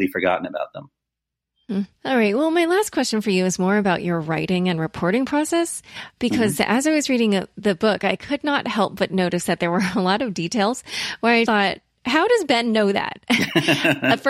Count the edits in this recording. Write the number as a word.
two